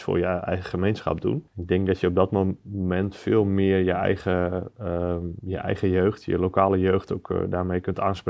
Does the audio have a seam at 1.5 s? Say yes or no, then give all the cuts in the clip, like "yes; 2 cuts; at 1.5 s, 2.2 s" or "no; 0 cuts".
yes; 1 cut; at 1.5 s